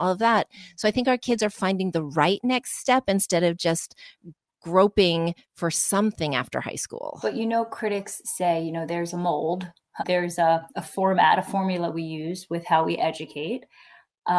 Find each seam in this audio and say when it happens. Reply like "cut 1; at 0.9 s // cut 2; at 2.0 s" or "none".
cut 1; at 10.0 s